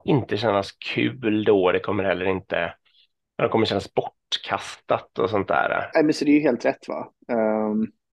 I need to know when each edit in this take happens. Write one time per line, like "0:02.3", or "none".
0:05.9